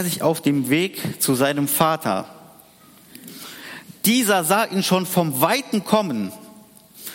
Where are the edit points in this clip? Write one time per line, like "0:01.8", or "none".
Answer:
none